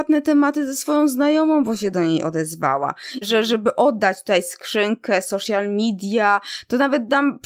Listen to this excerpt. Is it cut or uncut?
cut